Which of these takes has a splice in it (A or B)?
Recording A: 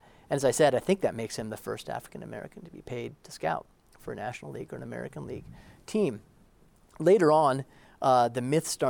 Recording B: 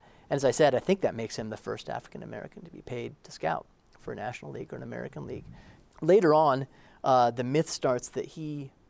B